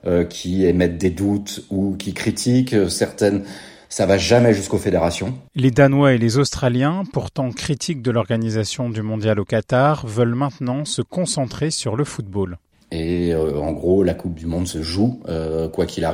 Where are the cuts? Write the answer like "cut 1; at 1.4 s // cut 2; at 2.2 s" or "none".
cut 1; at 12.8 s